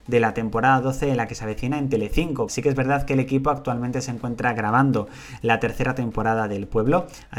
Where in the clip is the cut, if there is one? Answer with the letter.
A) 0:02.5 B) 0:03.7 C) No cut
A